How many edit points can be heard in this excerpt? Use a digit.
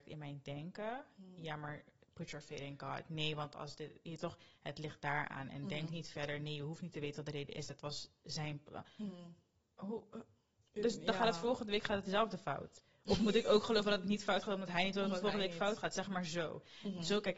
0